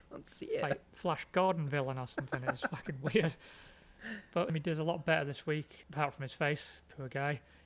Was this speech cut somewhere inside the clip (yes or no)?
yes